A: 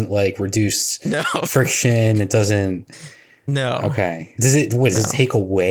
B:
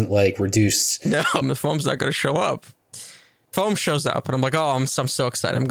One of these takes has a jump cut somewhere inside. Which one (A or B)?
B